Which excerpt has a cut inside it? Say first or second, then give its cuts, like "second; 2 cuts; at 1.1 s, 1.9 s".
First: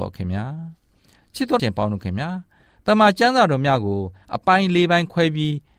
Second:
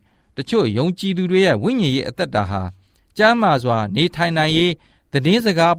first; 1 cut; at 1.6 s